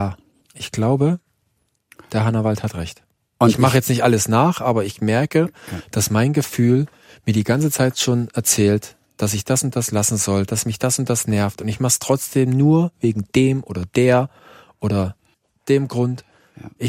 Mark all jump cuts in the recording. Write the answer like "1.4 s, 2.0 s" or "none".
none